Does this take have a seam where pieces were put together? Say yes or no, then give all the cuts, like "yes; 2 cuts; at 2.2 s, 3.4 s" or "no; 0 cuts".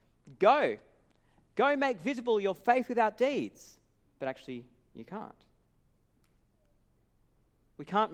yes; 1 cut; at 4.0 s